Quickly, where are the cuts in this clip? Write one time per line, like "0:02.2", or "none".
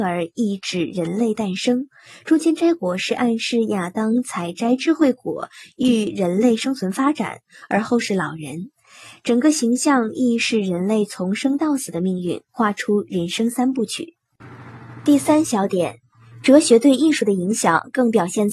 none